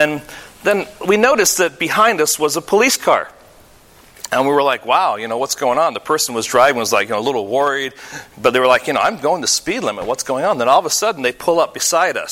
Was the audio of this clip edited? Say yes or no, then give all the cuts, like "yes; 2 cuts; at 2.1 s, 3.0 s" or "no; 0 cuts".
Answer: no; 0 cuts